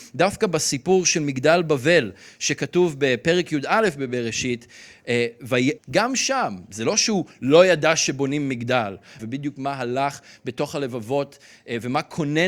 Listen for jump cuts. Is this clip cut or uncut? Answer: cut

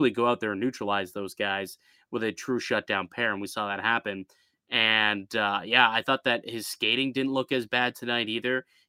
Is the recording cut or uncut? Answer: uncut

